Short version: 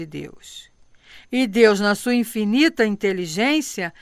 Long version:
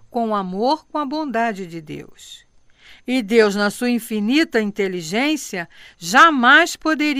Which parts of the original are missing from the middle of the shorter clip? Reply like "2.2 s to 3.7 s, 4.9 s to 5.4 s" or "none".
none